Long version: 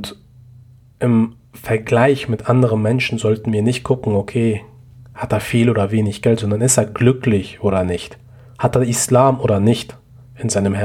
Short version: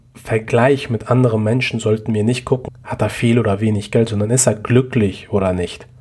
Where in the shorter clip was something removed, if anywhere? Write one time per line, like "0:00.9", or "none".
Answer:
0:02.7